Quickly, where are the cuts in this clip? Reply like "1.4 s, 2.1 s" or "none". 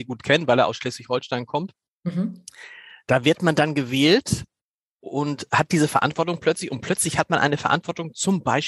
none